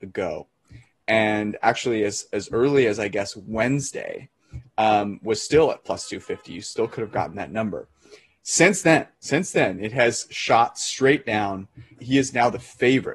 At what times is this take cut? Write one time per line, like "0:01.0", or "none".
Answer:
0:09.1
0:12.0